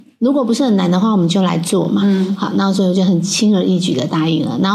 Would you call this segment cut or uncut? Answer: uncut